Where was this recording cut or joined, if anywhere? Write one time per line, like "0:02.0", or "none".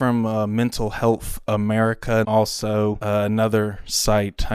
0:02.2